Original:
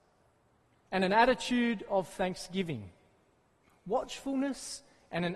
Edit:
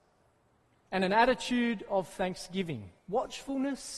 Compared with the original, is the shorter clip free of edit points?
no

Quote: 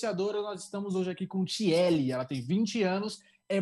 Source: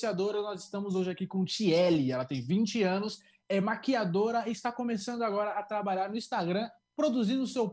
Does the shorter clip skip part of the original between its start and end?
no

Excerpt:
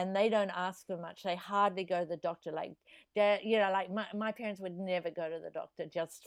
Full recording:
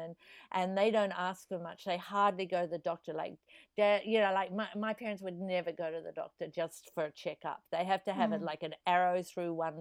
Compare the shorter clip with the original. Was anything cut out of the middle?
no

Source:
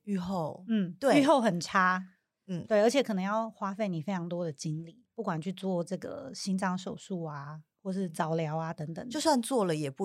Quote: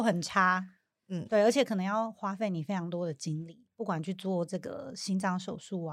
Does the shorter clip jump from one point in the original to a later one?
no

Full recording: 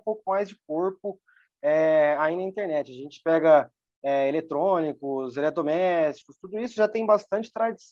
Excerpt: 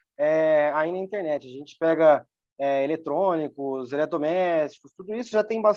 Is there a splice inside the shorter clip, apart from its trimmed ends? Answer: no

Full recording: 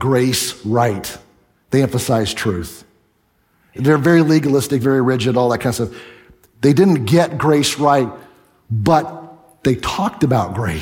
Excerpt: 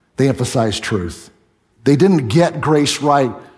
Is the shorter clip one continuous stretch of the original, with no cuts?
no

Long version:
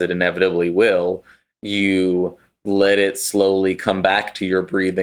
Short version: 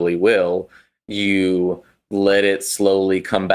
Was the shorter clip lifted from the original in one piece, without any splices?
yes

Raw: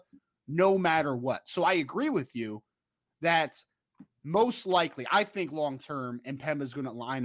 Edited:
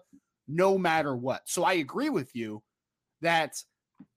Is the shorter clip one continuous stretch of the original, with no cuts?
yes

